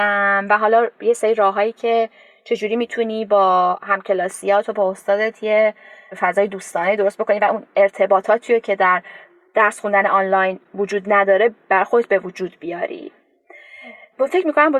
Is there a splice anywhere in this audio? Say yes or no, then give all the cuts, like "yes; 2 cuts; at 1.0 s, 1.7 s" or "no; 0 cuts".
no; 0 cuts